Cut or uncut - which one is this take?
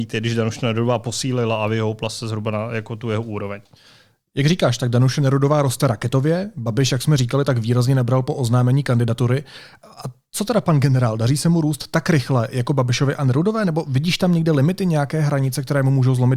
uncut